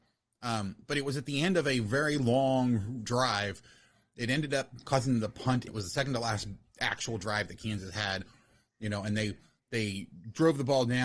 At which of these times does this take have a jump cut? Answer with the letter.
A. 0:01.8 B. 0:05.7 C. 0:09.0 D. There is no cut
B